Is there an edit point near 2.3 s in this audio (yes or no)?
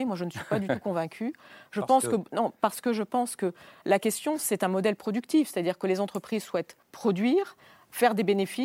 no